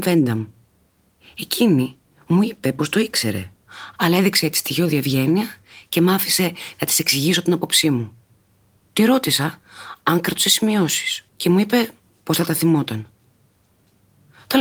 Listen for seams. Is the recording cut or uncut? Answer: cut